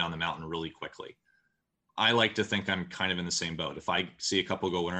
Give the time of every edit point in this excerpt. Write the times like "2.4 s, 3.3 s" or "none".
none